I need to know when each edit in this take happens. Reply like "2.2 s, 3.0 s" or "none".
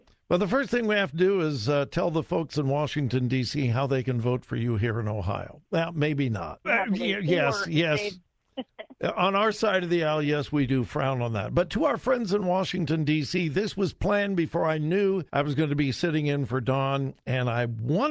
6.6 s, 15.3 s